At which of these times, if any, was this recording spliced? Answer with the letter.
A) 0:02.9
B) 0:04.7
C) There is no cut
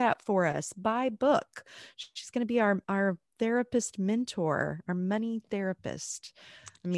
C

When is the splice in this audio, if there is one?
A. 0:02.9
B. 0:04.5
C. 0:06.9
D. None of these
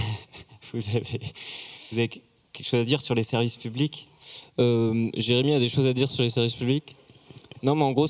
D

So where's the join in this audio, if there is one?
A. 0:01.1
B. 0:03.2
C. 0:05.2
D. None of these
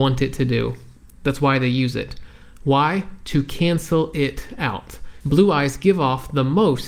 C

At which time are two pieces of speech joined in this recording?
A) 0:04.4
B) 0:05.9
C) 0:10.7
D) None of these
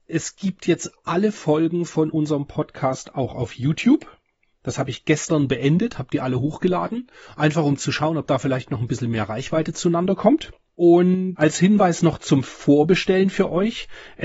D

